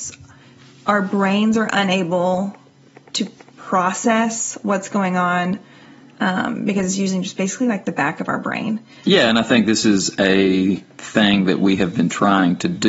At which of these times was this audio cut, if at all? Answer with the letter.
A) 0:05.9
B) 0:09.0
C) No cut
B